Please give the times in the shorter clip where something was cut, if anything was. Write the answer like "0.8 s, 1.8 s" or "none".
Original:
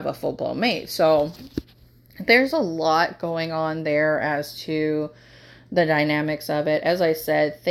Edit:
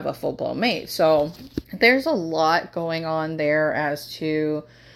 1.7 s

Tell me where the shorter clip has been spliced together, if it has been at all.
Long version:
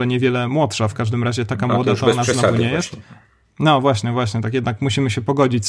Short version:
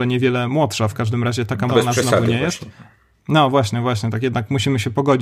1.7 s

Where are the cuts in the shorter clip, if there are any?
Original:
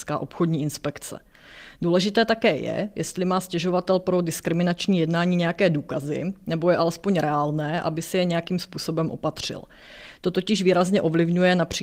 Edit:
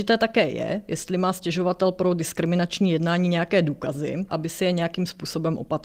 4.3 s

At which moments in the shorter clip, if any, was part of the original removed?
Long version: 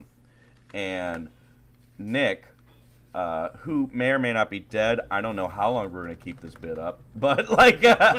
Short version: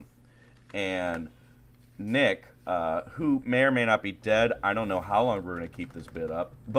2.5 s

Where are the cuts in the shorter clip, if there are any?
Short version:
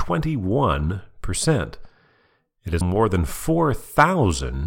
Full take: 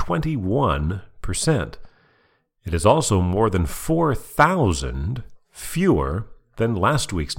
2.8 s

